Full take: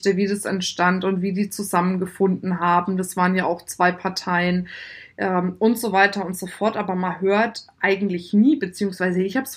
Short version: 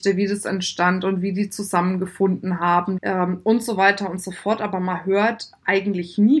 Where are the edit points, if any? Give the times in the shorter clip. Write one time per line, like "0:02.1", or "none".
0:03.0